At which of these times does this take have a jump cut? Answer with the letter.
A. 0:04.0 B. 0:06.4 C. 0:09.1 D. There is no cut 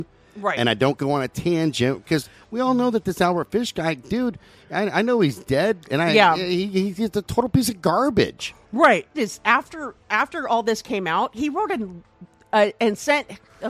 C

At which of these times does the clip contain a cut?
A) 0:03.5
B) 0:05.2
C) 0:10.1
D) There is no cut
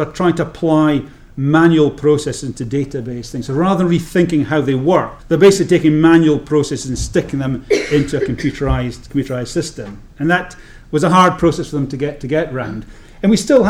B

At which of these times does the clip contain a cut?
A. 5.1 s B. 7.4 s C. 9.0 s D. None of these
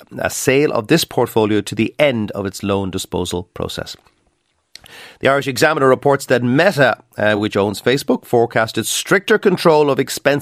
D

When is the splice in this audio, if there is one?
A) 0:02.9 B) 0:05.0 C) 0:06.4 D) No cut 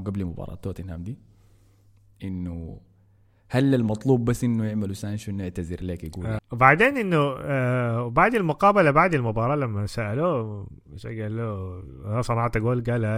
C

